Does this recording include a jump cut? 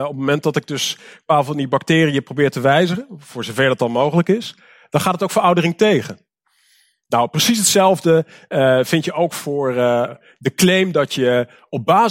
no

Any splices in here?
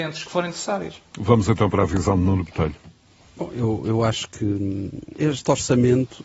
no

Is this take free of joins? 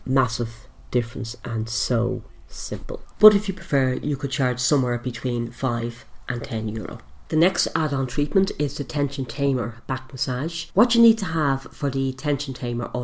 no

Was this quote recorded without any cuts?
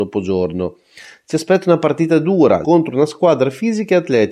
no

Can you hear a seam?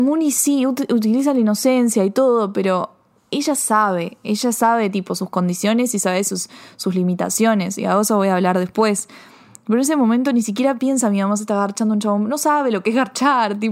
no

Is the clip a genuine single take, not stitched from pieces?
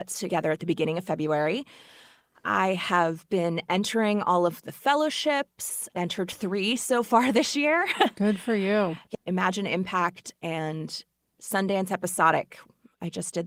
no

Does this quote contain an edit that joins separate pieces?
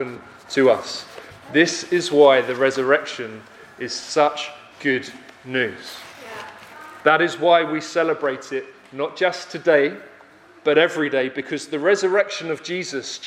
no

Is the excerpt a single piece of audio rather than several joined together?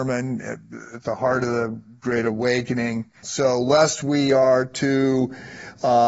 no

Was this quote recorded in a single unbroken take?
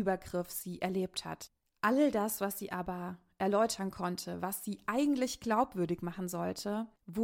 yes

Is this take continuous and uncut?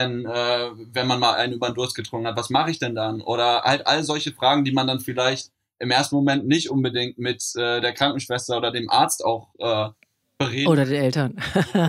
yes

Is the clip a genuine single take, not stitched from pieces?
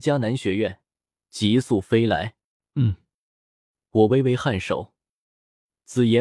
no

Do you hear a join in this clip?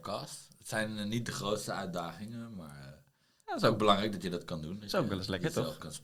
no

